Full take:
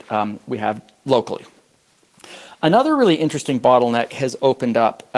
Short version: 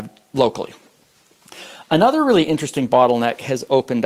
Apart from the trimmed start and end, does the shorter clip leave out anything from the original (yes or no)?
no